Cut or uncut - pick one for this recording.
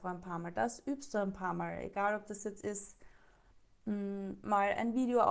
uncut